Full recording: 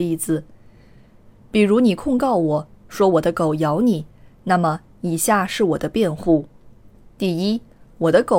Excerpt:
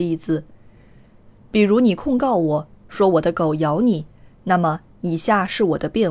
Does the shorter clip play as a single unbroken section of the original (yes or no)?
yes